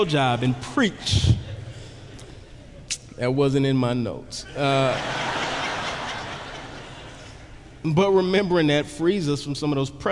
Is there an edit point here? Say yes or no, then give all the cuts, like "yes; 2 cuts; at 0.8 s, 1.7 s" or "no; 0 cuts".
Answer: no; 0 cuts